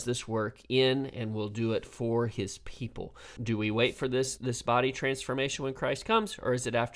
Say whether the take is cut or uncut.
cut